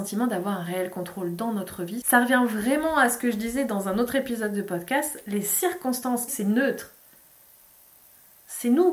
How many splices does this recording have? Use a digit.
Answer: 2